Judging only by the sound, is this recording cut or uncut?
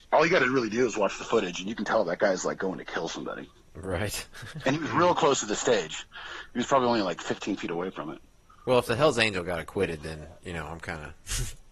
uncut